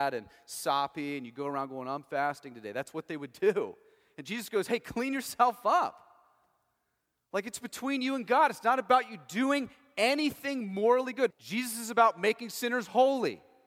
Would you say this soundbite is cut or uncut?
cut